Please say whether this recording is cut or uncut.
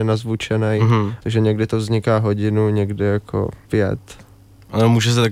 cut